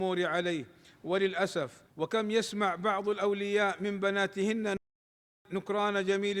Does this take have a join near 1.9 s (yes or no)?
yes